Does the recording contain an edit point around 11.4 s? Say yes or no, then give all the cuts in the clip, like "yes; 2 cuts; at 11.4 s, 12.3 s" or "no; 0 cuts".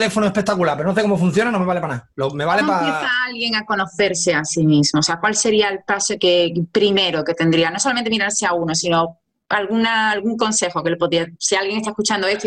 no; 0 cuts